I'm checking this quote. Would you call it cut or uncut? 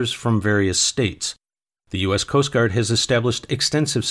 uncut